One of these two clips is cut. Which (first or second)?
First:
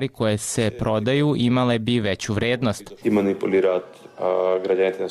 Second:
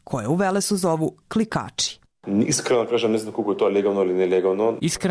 first